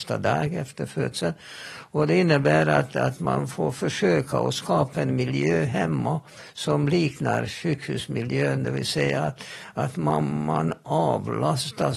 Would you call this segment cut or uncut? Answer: uncut